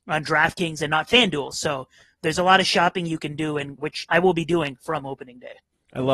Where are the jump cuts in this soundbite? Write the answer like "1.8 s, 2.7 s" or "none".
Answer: 3.8 s